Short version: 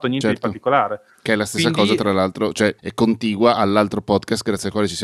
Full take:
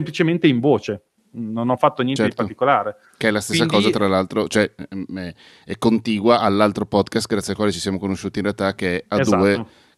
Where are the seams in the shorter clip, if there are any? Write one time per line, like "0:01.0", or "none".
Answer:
0:02.8